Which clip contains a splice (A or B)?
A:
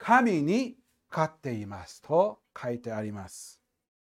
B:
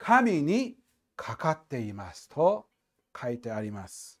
A